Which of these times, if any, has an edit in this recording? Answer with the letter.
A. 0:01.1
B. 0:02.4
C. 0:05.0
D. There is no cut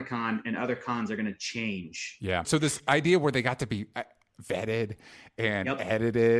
B